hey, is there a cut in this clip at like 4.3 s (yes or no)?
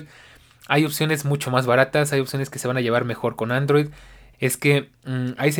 yes